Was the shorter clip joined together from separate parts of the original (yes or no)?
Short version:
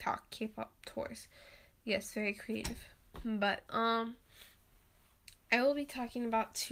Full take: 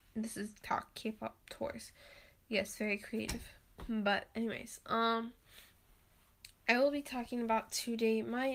yes